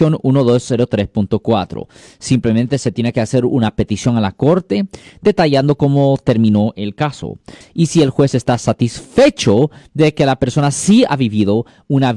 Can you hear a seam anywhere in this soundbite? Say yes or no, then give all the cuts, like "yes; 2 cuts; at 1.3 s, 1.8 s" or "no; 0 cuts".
yes; 1 cut; at 7.6 s